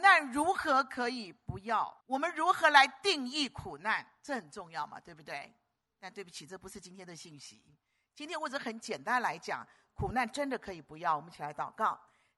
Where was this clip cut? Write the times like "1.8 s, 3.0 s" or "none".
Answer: 2.0 s